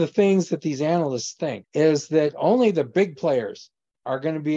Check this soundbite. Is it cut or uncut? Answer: cut